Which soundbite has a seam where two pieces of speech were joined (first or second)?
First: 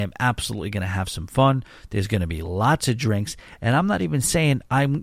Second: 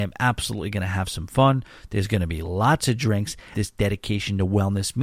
second